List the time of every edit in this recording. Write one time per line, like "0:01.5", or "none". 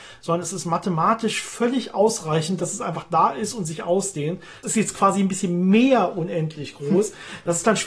0:04.6